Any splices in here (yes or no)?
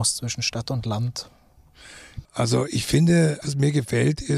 yes